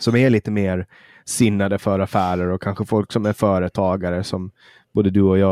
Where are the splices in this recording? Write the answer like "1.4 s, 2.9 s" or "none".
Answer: none